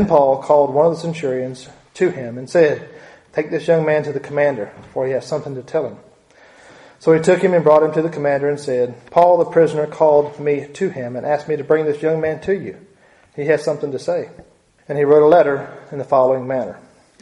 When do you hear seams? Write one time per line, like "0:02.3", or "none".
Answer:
0:14.8